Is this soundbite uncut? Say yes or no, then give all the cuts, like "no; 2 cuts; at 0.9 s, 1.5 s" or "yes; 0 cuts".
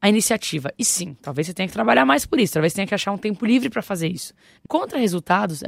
no; 1 cut; at 4.7 s